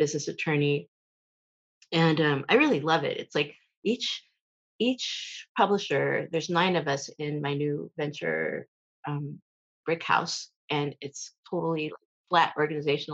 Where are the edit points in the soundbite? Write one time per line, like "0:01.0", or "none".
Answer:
0:09.8